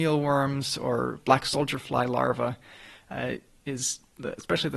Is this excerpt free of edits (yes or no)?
yes